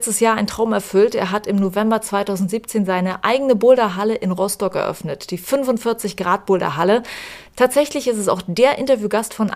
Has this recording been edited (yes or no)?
yes